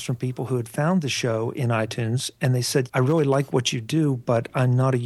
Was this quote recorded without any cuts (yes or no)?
no